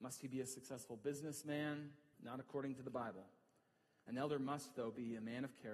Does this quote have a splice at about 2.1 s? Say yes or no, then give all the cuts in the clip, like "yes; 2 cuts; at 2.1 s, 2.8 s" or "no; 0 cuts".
yes; 1 cut; at 2.1 s